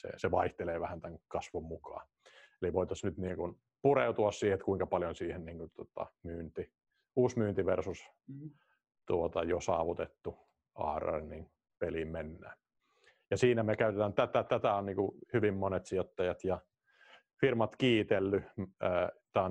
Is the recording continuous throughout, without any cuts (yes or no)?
yes